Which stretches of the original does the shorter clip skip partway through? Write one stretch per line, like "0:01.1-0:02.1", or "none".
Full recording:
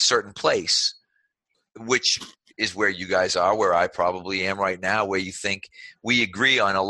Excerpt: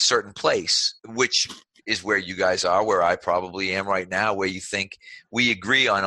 0:01.0-0:01.7